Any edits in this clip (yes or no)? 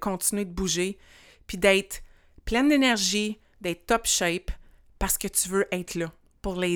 no